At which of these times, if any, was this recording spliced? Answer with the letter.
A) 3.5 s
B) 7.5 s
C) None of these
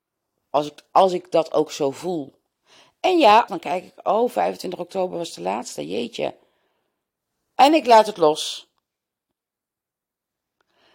A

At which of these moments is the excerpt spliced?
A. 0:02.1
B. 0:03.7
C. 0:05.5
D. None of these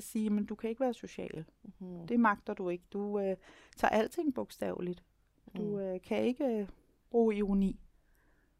D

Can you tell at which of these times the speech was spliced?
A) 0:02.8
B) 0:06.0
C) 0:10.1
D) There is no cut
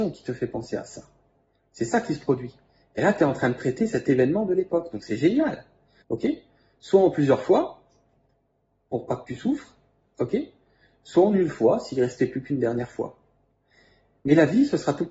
B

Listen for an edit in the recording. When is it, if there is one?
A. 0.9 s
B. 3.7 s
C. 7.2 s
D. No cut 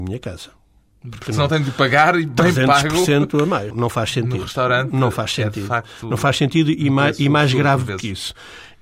B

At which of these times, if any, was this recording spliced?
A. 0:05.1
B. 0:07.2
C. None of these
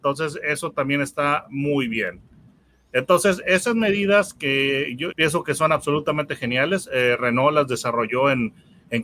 A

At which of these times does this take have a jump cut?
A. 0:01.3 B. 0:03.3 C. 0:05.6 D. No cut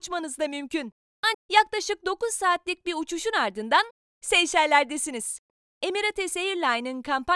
A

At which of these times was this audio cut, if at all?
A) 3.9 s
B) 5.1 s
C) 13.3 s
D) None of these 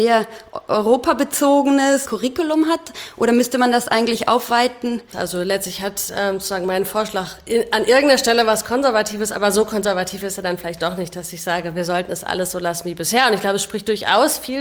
B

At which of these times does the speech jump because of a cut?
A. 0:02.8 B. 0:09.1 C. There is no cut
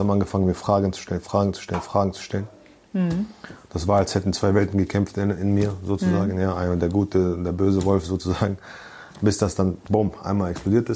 C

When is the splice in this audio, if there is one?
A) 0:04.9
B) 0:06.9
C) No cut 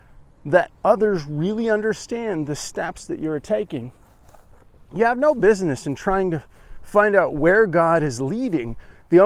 C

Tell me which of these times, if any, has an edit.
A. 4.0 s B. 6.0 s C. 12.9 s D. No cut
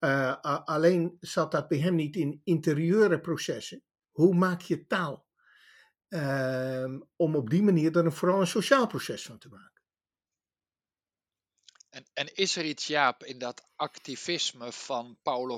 A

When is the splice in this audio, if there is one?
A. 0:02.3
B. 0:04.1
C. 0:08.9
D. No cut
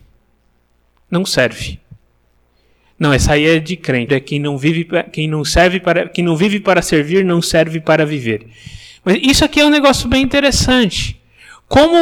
B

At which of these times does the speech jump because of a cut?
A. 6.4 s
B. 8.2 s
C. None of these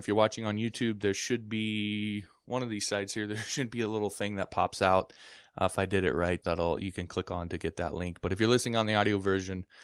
A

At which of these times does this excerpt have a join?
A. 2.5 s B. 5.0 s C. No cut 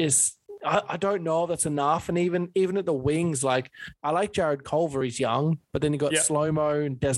C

